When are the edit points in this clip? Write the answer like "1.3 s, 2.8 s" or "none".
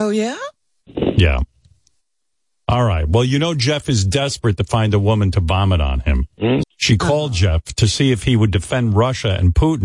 6.6 s